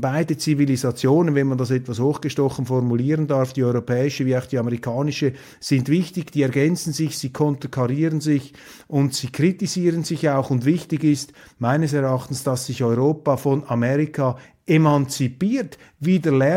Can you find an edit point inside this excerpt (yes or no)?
no